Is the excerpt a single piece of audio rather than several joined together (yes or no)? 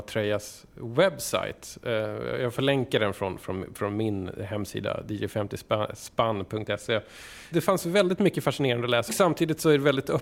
no